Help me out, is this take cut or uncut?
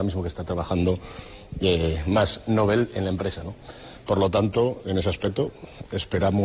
uncut